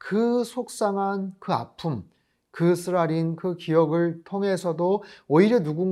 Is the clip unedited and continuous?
yes; 0 cuts

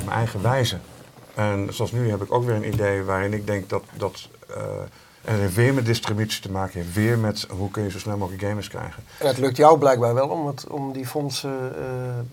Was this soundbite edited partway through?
no; 0 cuts

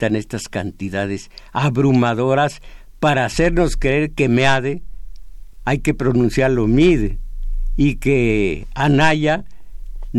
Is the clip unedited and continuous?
yes; 0 cuts

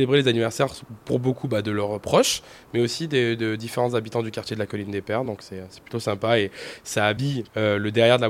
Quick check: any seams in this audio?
no; 0 cuts

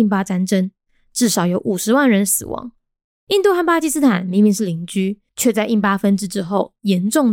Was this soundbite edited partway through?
yes; 2 cuts; at 3.1 s, 5.3 s

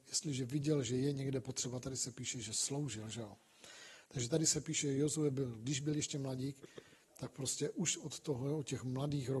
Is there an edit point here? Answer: yes; 1 cut; at 4.1 s

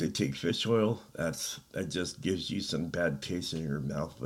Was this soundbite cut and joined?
no; 0 cuts

